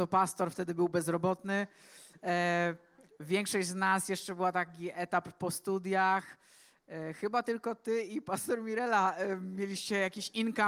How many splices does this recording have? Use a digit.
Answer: 0